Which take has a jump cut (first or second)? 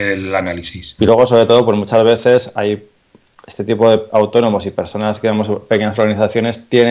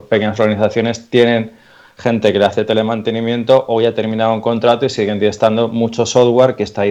first